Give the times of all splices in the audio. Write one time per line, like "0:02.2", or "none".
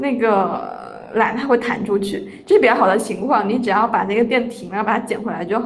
none